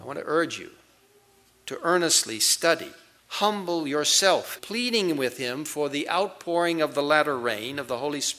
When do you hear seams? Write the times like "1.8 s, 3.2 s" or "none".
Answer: 3.2 s, 4.6 s